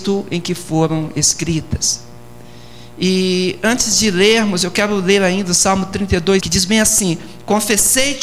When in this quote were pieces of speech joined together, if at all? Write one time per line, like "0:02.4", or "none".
0:06.4